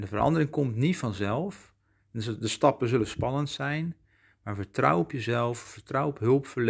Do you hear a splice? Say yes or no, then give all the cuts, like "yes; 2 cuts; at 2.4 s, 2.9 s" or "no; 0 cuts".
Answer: no; 0 cuts